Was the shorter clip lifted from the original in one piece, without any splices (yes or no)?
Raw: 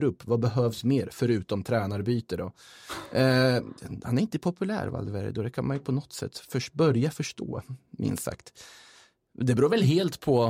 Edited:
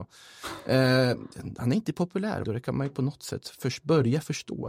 no